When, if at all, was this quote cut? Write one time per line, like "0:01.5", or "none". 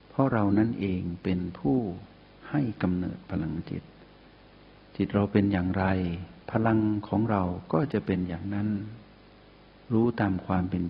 0:06.4